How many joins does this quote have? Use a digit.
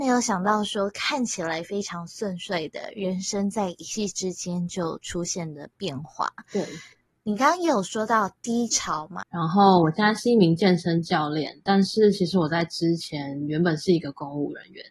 1